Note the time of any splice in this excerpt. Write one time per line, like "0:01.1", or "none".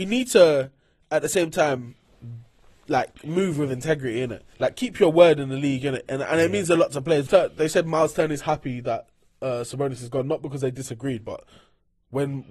0:04.5
0:07.3